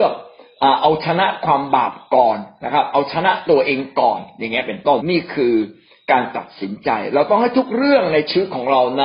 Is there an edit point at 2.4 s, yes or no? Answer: no